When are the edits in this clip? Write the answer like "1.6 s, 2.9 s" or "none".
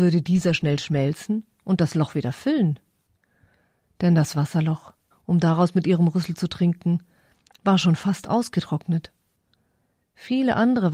5.1 s

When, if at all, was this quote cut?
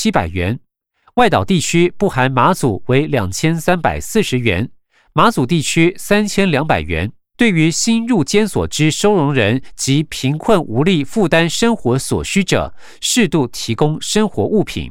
7.3 s

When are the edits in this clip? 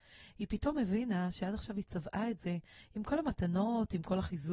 none

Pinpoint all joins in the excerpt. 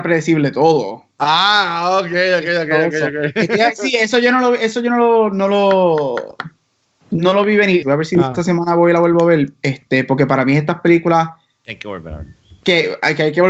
7.8 s

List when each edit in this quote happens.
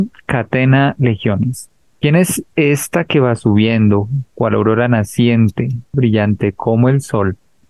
1.9 s, 5.9 s

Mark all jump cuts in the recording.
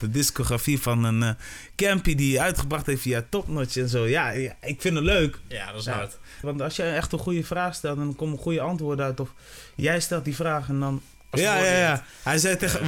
6.4 s, 11.3 s

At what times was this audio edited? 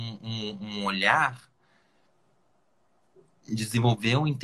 none

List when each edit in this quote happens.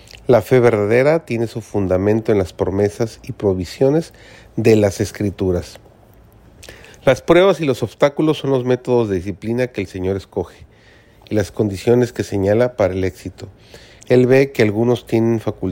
14.0 s

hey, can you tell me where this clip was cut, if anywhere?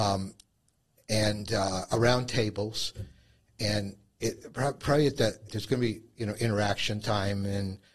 5.5 s

